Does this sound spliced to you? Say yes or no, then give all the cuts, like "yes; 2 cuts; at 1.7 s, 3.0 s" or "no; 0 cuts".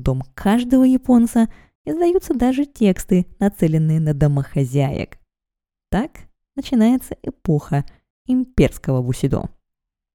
no; 0 cuts